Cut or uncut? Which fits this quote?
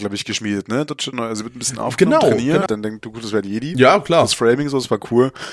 cut